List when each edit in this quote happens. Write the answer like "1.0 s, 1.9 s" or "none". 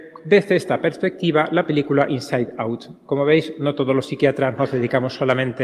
none